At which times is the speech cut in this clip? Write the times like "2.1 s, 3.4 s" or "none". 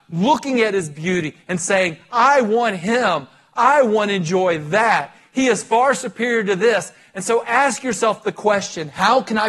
none

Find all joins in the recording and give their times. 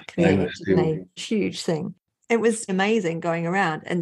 1.2 s, 2.7 s

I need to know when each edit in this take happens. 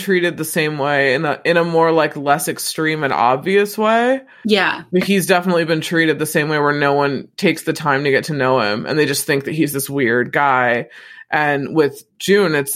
none

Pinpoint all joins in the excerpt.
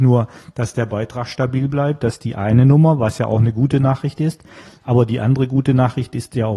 none

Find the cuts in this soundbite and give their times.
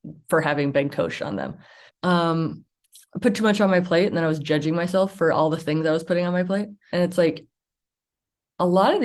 1.9 s, 6.9 s

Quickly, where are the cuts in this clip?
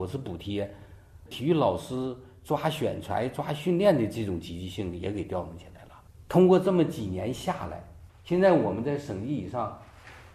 1.3 s

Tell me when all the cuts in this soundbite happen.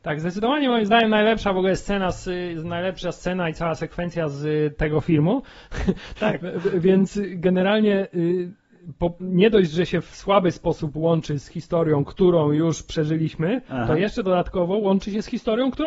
6.2 s

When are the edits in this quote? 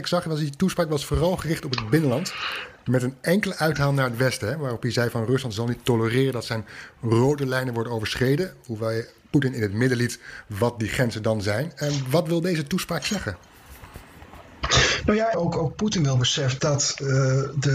15.3 s, 16.6 s

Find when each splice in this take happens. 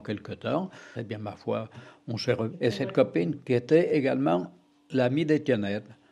0.9 s, 2.5 s

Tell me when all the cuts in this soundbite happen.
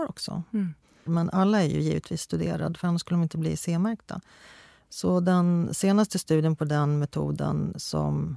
1.1 s

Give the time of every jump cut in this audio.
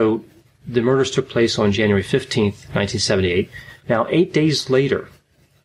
3.8 s

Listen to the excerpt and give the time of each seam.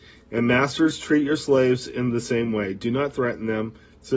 none

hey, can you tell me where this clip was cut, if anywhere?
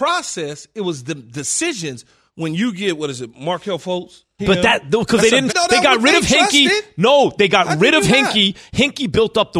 4.4 s, 5.5 s

